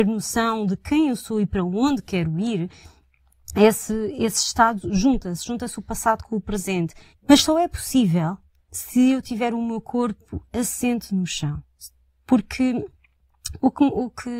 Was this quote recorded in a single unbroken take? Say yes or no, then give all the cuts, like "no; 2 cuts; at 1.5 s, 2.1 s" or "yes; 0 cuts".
no; 1 cut; at 7.1 s